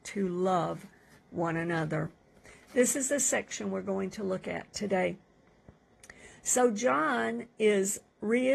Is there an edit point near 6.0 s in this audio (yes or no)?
no